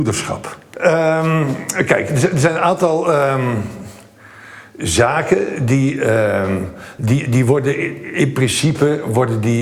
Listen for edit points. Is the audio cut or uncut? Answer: uncut